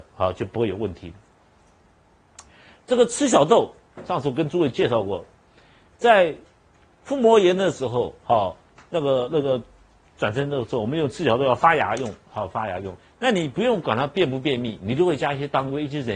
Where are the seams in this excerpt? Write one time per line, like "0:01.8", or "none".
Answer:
0:13.0